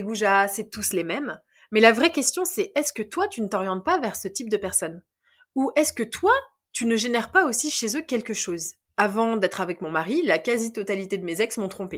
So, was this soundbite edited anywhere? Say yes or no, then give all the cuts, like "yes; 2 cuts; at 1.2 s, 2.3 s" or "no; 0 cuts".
no; 0 cuts